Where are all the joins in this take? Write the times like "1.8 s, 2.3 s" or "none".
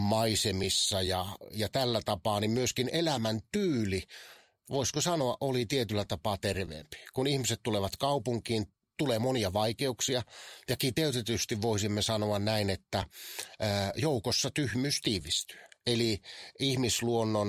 none